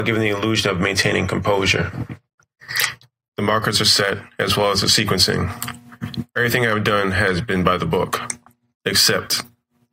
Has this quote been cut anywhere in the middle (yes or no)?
yes